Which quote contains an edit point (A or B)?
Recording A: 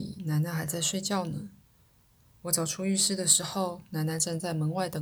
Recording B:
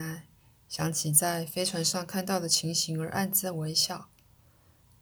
A